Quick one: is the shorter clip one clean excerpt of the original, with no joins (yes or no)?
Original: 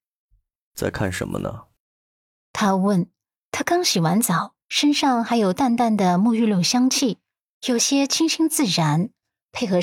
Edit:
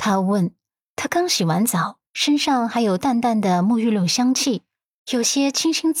yes